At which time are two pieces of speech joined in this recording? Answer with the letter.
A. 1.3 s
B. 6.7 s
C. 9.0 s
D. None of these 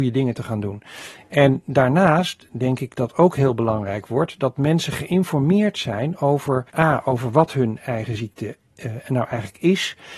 B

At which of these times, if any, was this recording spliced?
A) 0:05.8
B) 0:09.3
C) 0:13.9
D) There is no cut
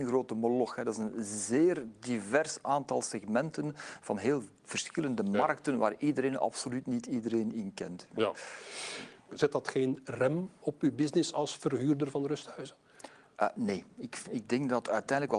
B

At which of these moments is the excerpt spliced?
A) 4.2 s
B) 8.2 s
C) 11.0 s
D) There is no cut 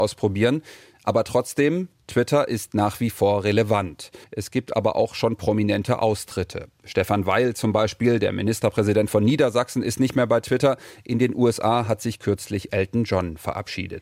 A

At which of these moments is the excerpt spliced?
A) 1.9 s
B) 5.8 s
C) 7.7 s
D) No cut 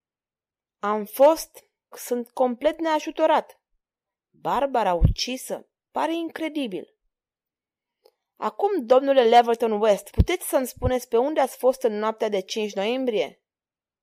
A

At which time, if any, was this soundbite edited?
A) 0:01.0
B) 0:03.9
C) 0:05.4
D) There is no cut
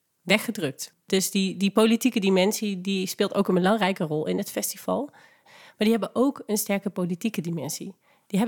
C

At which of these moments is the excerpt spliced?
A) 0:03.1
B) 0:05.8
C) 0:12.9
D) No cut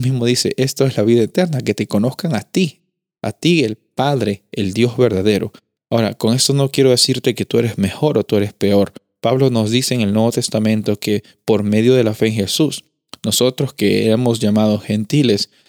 B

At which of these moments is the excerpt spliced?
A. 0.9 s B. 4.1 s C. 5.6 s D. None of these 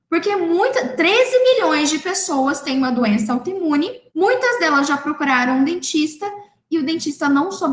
B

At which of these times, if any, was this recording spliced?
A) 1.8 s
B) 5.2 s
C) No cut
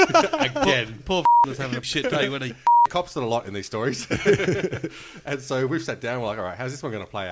A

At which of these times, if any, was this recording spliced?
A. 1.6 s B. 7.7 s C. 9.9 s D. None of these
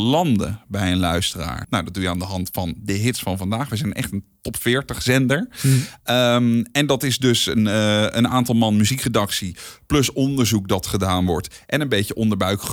A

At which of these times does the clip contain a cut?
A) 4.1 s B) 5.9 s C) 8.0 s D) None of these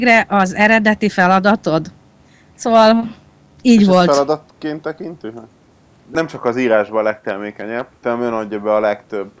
B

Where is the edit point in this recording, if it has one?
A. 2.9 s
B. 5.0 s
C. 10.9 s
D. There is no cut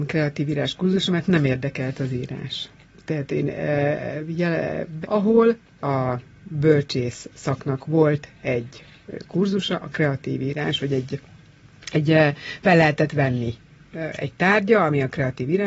B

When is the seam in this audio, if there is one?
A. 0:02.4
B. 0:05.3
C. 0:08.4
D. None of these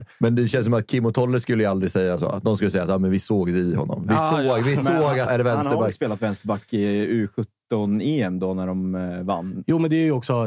B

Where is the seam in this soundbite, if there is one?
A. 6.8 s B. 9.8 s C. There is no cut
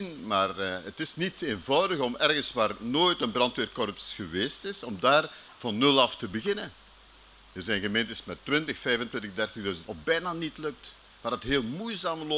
B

